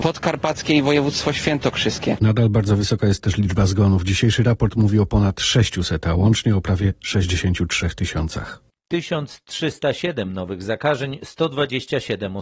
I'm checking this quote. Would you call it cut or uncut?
uncut